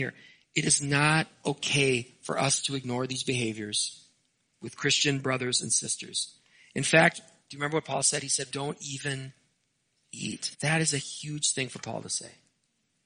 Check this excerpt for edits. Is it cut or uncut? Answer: cut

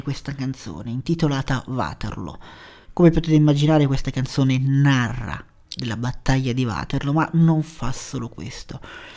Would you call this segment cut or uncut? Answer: uncut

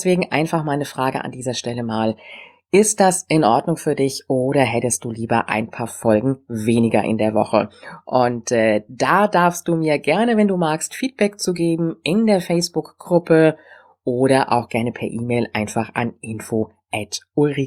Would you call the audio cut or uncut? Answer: uncut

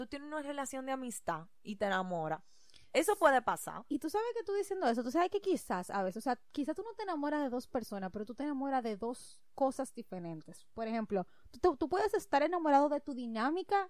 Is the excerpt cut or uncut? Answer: uncut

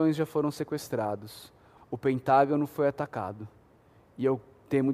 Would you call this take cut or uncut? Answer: cut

